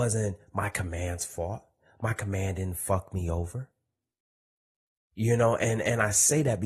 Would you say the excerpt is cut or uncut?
uncut